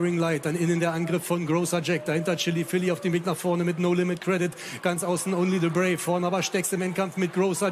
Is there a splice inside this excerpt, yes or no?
no